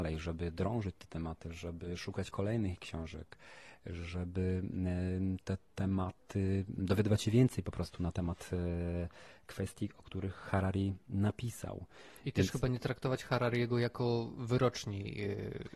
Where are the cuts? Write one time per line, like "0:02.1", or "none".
none